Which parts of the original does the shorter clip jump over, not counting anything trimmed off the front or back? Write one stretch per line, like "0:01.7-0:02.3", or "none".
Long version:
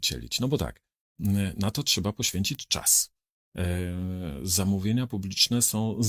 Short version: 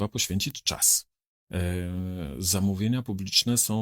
none